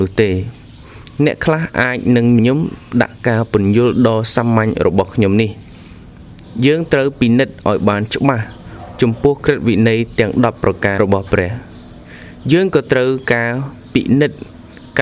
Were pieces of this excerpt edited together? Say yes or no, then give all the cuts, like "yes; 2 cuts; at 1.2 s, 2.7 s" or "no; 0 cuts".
yes; 2 cuts; at 2.4 s, 11.0 s